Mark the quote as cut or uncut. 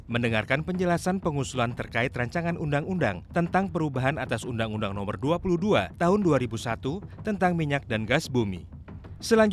uncut